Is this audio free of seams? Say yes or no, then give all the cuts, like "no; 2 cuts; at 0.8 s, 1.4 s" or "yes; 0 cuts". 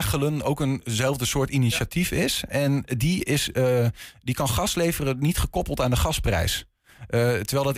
yes; 0 cuts